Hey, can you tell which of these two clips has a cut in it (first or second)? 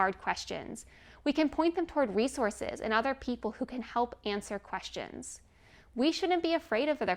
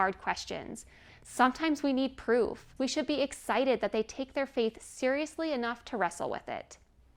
second